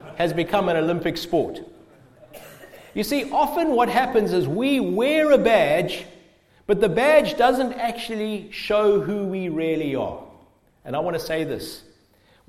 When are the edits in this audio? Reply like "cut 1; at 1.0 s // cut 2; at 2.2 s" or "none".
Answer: none